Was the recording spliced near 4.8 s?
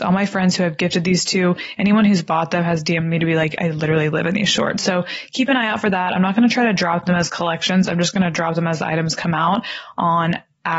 yes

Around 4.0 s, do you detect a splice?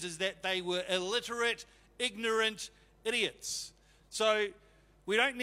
yes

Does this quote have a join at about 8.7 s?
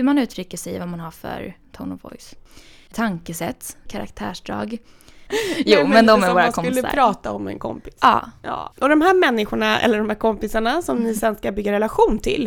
no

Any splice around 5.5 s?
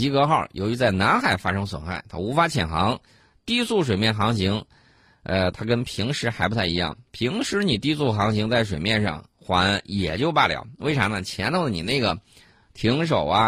yes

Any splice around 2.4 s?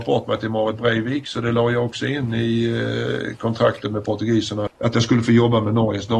no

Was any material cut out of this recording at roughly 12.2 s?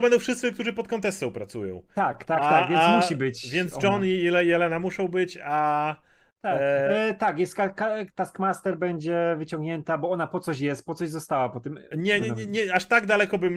yes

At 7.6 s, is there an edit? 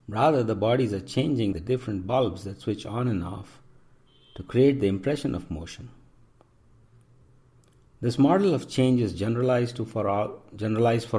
no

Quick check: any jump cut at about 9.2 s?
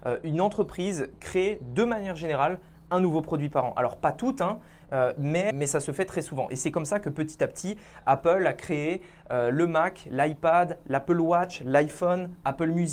no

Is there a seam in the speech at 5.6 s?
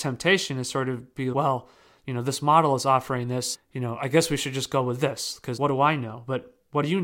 yes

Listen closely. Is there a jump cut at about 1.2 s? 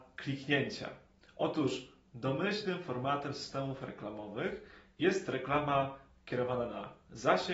no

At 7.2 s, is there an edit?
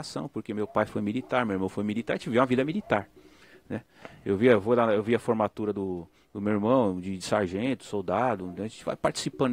no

